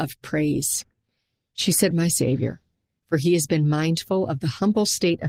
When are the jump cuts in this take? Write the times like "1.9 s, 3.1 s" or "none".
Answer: 1.9 s